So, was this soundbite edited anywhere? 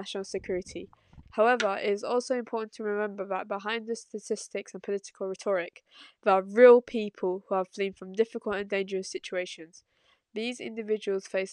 yes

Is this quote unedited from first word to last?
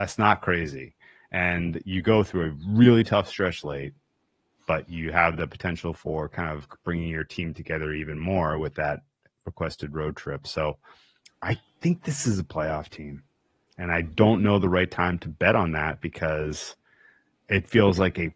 yes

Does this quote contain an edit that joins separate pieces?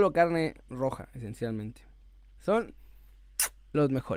yes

